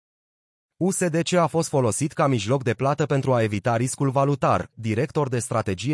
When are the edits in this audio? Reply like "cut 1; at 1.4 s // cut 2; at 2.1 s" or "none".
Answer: cut 1; at 4.7 s

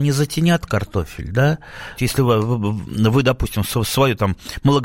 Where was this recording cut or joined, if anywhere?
cut 1; at 2.0 s

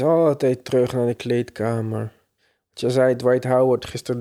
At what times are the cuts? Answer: none

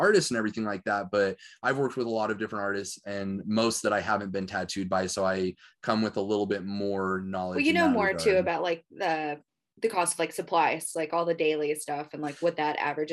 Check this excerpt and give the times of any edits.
none

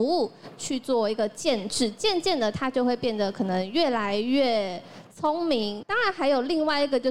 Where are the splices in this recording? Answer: cut 1; at 5.8 s

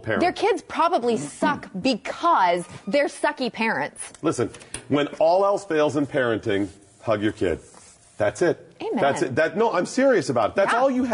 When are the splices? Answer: none

